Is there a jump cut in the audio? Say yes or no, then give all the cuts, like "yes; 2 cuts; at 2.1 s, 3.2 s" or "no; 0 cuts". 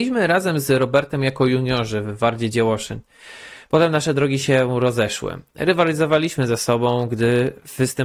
no; 0 cuts